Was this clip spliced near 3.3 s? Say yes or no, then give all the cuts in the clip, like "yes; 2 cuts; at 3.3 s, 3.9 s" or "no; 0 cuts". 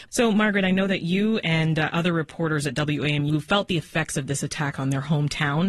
yes; 1 cut; at 3.3 s